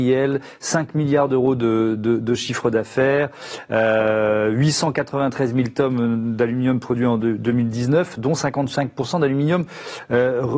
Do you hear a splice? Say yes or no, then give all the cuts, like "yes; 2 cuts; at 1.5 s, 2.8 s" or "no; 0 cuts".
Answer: no; 0 cuts